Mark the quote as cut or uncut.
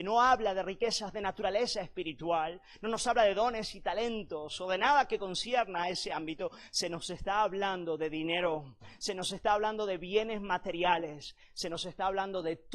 uncut